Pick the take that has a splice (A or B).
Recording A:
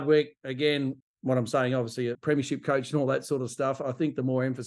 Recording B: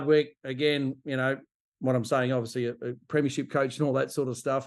A